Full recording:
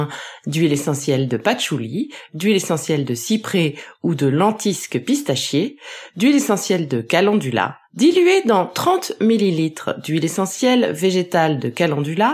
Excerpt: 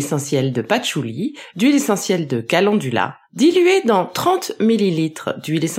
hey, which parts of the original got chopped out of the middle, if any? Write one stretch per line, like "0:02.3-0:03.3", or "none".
0:02.3-0:06.1

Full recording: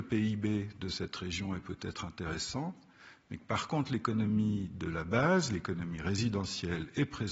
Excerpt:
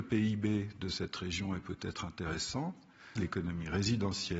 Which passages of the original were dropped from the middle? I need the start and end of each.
0:03.2-0:05.5

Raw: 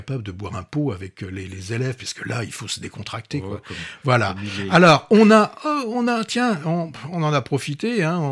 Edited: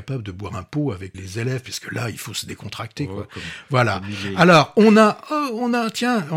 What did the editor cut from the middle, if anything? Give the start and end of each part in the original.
0:01.1-0:01.5

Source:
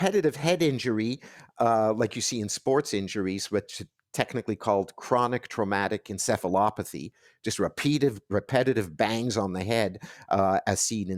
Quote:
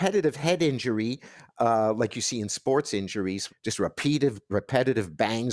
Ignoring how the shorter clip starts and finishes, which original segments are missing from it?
0:03.5-0:07.3

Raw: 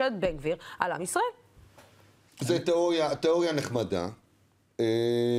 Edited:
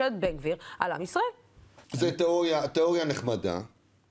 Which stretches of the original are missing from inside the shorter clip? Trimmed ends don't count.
0:01.8-0:02.3

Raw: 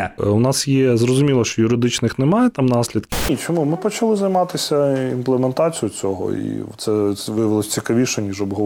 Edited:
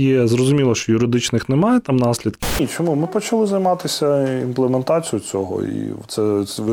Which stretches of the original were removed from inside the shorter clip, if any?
none

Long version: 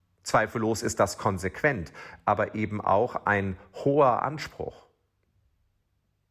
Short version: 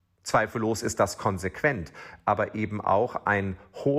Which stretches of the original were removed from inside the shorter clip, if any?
none

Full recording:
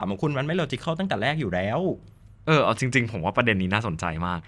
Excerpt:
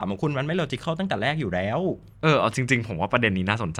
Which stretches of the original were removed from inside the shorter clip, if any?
0:02.1-0:02.4

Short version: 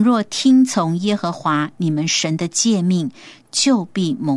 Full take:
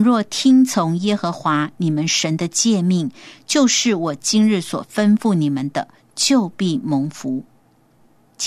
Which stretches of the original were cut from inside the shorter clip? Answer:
0:03.4-0:06.0

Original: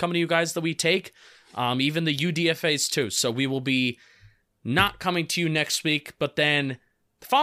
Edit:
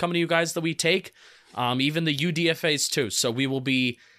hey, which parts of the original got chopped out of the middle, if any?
none

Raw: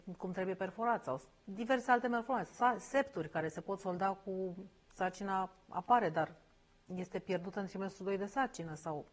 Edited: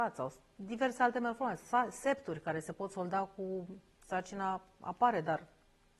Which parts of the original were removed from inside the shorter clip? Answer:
none

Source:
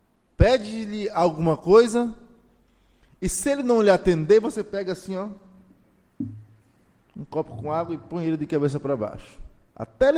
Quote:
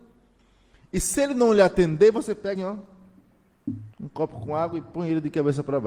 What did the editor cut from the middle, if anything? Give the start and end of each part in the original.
0:04.8-0:05.1
0:06.5-0:07.1

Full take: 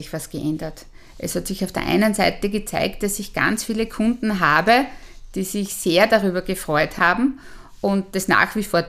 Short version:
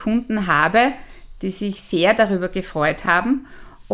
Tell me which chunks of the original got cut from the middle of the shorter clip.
none

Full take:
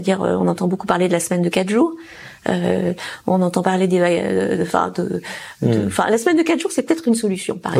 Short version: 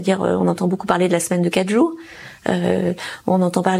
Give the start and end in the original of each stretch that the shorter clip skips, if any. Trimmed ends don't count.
none

